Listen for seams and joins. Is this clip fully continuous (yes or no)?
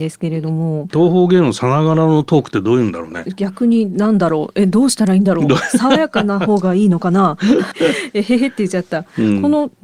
no